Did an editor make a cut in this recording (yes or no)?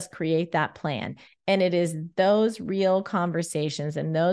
no